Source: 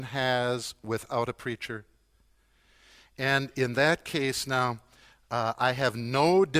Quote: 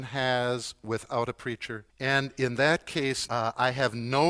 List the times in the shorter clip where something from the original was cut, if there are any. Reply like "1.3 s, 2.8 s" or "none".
1.9 s, 3.3 s